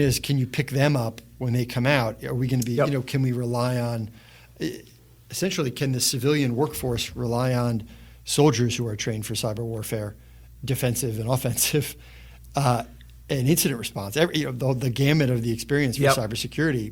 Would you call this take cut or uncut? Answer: uncut